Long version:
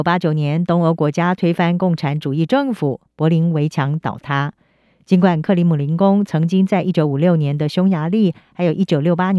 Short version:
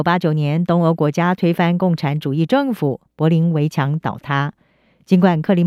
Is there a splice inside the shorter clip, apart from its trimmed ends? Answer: no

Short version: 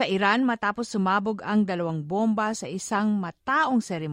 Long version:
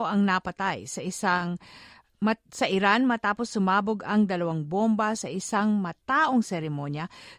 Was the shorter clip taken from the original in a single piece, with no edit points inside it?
yes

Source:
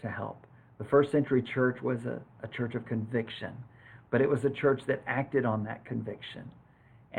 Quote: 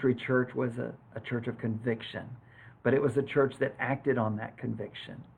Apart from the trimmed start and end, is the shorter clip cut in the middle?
no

